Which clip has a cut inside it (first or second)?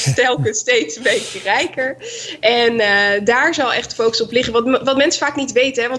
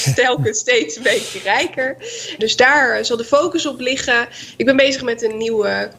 second